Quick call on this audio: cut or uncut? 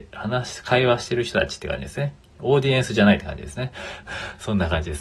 cut